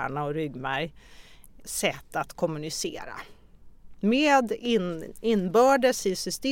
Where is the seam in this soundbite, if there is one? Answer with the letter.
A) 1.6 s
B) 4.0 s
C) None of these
A